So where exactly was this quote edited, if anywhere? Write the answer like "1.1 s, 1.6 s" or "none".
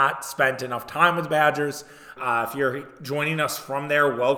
2.2 s

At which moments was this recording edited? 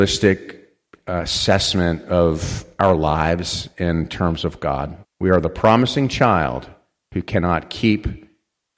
5.0 s

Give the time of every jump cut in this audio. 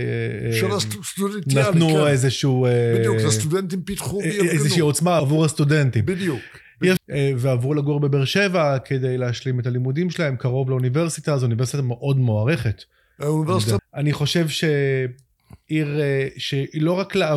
5.2 s, 7.0 s, 13.8 s

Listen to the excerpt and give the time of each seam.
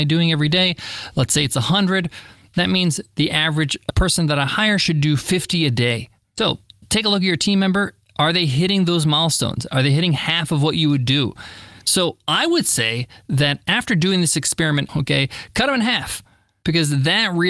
11.8 s, 14.9 s

